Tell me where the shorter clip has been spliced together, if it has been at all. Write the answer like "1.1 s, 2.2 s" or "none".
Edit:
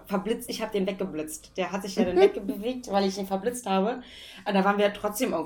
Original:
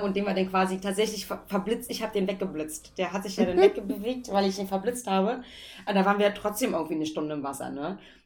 none